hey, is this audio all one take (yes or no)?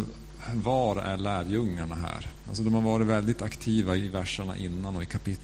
no